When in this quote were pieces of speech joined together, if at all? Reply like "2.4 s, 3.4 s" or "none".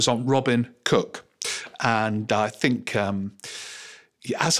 none